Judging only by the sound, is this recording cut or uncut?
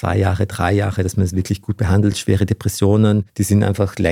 uncut